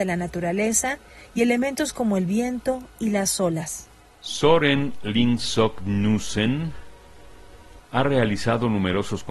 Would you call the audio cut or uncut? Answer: cut